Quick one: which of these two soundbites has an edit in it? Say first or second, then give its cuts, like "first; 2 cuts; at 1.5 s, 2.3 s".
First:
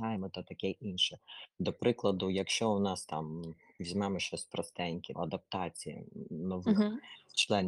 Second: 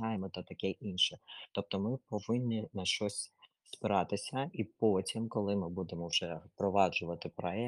first; 2 cuts; at 1.5 s, 5.1 s